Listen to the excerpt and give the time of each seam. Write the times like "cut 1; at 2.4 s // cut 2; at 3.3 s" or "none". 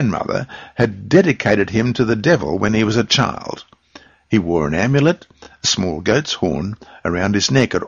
none